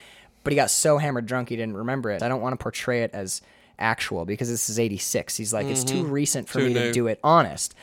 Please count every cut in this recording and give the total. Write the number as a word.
one